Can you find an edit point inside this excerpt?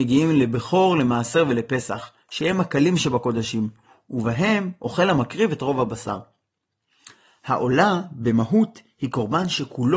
no; 0 cuts

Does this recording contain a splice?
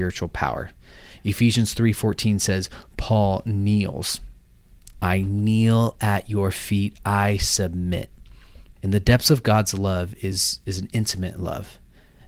yes; 2 cuts; at 4.9 s, 8.8 s

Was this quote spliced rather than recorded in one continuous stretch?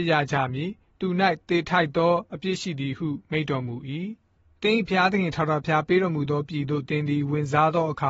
no; 0 cuts

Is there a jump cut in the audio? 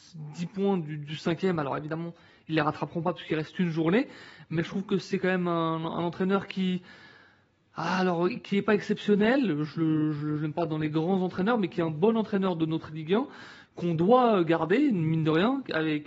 no; 0 cuts

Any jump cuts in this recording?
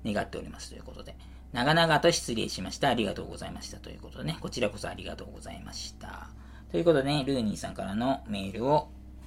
no; 0 cuts

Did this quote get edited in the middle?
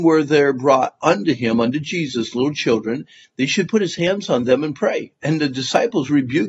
no; 0 cuts

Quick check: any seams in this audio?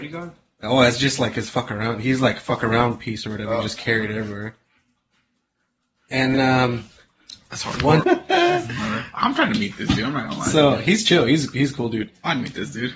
yes; 2 cuts; at 6.3 s, 8.0 s

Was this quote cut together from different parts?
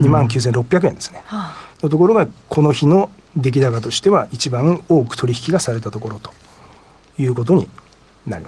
no; 0 cuts

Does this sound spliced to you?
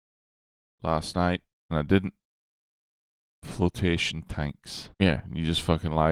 yes; 1 cut; at 4.9 s

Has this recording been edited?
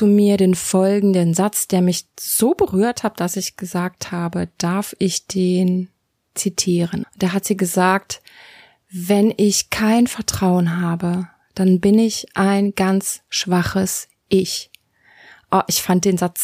yes; 1 cut; at 7.0 s

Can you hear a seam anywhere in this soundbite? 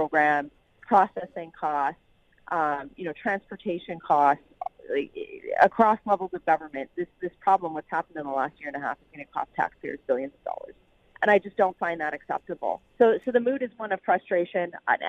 yes; 1 cut; at 12.9 s

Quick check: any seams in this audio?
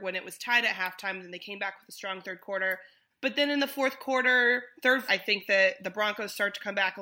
yes; 2 cuts; at 3.1 s, 5.1 s

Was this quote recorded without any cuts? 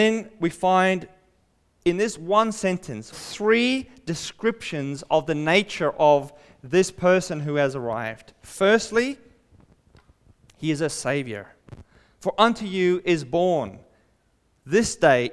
no; 1 cut; at 3.1 s

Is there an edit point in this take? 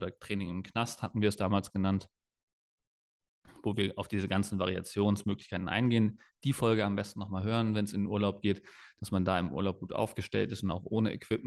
no; 0 cuts

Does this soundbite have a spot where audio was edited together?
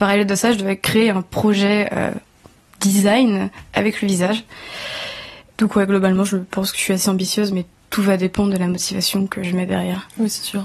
yes; 1 cut; at 5.5 s

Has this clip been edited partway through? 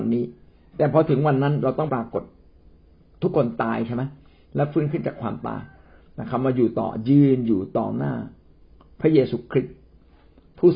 yes; 1 cut; at 1.9 s

